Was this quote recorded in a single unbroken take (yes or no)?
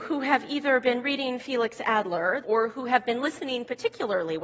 no